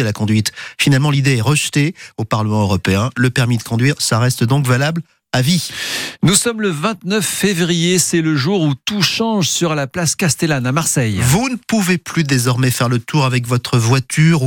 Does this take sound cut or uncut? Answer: uncut